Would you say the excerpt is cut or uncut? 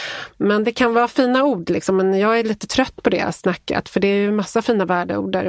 uncut